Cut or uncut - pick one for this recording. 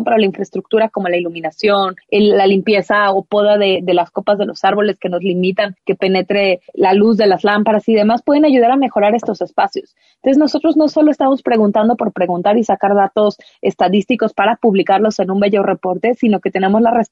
uncut